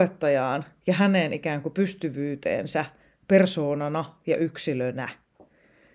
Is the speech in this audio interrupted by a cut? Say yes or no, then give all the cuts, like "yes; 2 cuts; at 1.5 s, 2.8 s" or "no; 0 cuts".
no; 0 cuts